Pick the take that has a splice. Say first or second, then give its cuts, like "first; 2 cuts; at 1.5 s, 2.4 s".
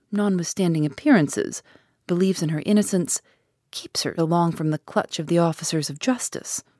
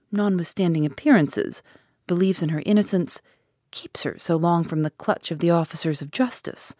first; 1 cut; at 4.2 s